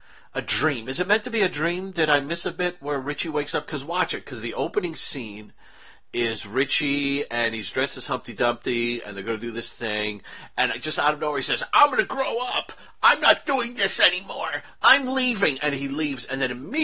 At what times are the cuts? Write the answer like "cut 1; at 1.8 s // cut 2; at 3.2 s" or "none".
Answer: none